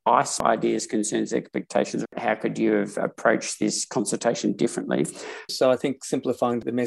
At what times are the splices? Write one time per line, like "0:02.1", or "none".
0:02.0
0:05.5